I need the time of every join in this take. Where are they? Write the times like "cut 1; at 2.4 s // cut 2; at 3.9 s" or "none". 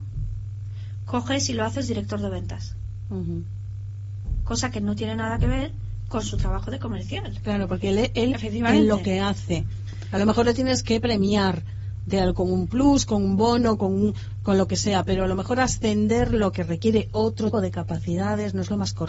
cut 1; at 8.3 s // cut 2; at 17.5 s